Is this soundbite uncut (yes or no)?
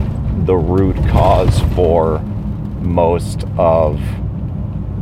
yes